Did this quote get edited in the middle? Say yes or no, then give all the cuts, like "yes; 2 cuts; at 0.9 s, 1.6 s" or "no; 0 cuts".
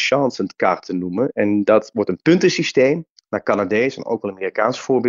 no; 0 cuts